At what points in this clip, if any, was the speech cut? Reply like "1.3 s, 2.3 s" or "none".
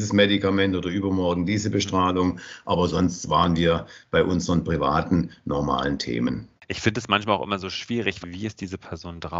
6.6 s, 8.2 s